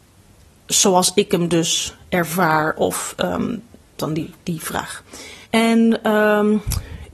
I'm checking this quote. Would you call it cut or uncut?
cut